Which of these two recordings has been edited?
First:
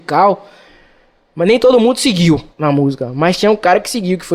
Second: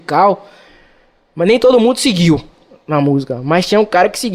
first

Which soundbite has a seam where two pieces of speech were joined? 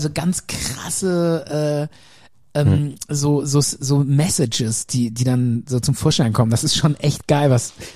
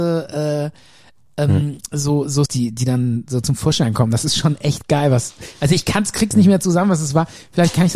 second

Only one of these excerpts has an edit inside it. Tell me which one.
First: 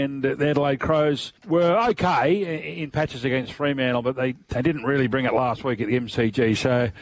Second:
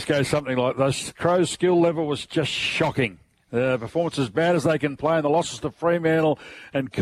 first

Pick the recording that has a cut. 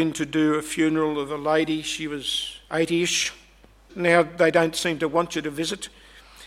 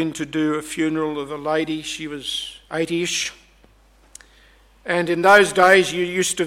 first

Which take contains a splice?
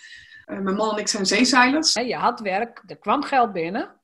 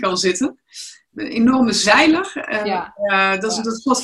first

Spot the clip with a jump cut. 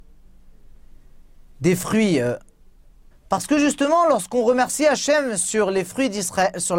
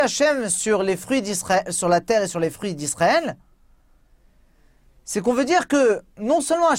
first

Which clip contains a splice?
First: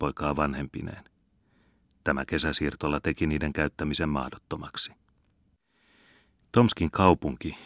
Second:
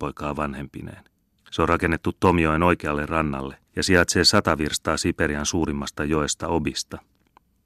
second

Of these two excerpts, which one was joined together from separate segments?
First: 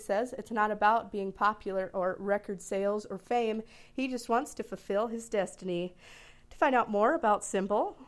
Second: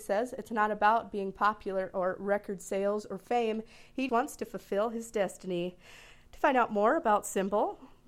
second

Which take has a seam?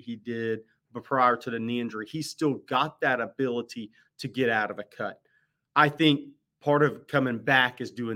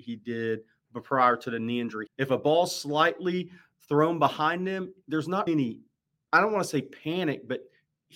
second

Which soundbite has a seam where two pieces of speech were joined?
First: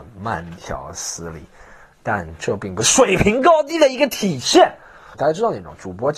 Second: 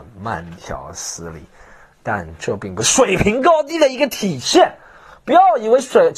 first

